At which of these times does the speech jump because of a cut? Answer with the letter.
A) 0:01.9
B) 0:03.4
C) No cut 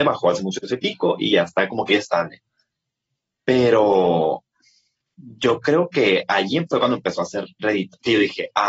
A